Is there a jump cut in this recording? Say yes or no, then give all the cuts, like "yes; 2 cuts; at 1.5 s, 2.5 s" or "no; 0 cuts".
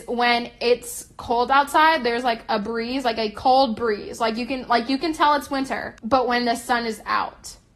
yes; 1 cut; at 6.0 s